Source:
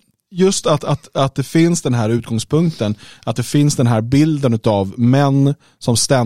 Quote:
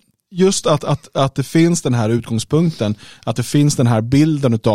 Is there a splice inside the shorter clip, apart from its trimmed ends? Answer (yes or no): no